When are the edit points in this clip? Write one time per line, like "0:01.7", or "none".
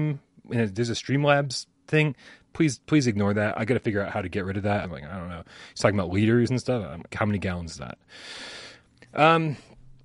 0:04.8
0:07.1